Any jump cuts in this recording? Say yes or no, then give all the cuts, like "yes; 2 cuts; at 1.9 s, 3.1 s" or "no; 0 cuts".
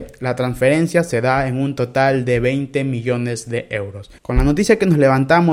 yes; 1 cut; at 4.2 s